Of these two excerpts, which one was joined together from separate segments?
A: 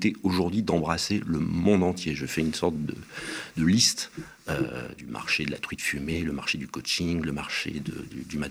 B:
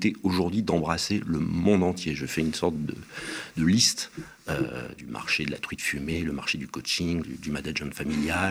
B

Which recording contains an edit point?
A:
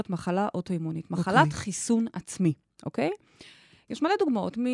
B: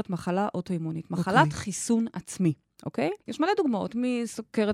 B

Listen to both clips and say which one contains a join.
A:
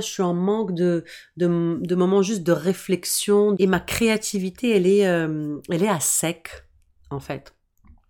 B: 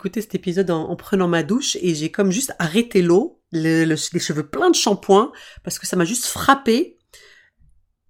A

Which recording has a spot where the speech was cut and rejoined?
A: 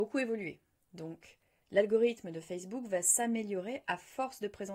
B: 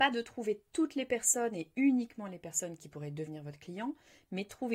A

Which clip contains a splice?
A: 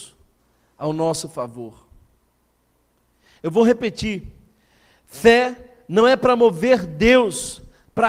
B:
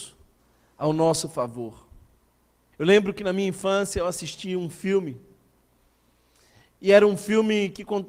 B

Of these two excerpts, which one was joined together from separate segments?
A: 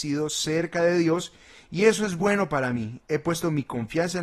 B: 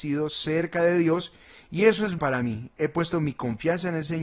B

